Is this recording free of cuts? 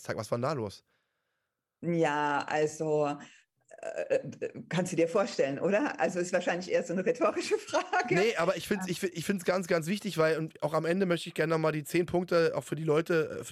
yes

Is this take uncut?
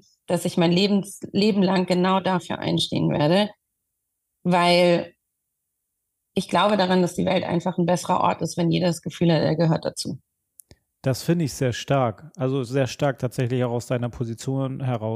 yes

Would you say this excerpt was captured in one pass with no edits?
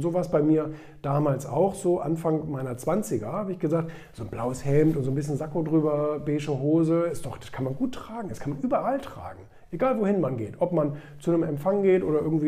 yes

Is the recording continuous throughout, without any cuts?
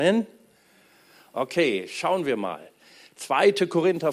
yes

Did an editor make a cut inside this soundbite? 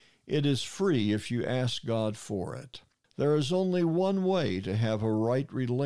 yes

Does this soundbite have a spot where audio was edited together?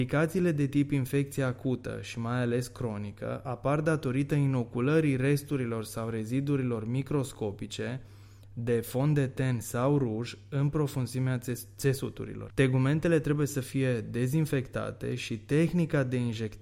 yes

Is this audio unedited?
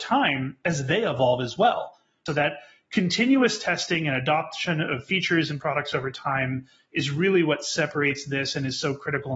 no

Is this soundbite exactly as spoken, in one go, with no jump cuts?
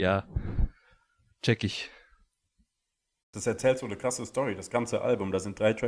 no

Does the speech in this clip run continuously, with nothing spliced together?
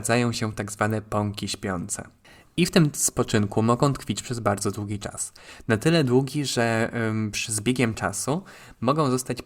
yes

